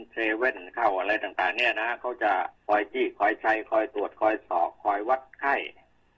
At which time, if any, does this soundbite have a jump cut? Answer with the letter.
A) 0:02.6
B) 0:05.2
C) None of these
A